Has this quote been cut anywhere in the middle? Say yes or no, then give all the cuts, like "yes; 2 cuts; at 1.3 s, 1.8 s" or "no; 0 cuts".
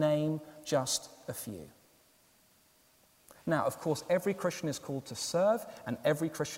no; 0 cuts